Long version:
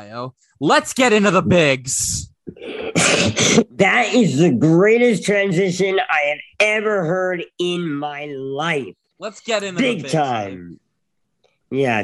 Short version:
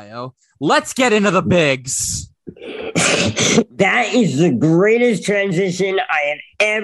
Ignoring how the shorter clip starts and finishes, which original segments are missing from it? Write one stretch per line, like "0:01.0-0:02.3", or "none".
none